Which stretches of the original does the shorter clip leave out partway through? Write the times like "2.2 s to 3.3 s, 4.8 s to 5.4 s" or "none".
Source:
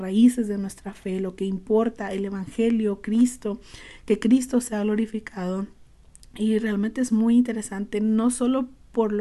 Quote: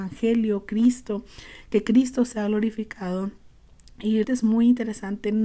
6.6 s to 6.9 s